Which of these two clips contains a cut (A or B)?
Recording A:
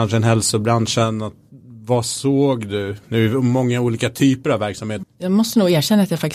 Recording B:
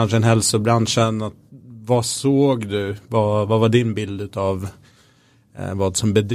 A